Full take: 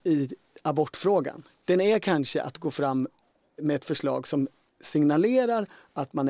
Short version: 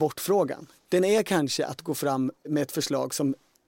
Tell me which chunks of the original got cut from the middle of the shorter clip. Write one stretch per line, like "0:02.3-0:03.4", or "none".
0:03.1-0:03.5

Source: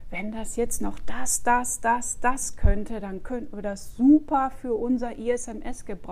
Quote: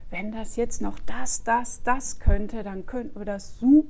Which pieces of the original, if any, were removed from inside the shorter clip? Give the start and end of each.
0:01.4-0:01.8

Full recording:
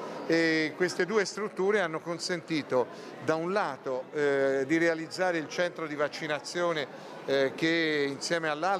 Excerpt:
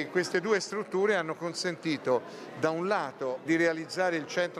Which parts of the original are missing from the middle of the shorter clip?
0:04.1-0:04.7

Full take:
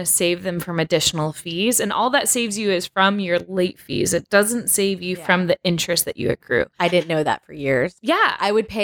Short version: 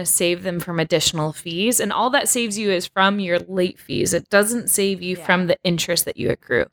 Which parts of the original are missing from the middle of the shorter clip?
none

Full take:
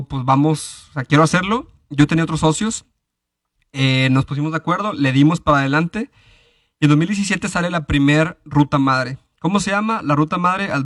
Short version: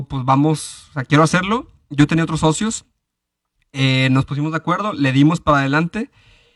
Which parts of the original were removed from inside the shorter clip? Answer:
none

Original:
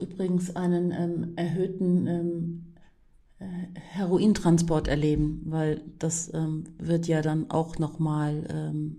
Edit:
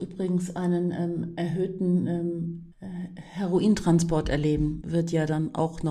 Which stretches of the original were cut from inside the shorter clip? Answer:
0:02.7-0:03.3
0:05.4-0:06.8

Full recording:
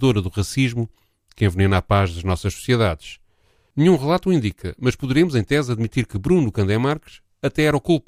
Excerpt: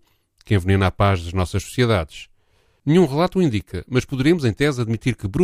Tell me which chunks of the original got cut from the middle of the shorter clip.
none

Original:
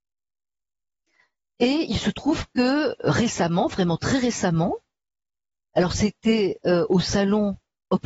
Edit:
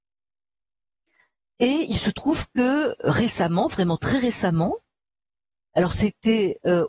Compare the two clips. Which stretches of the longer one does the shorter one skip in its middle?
none

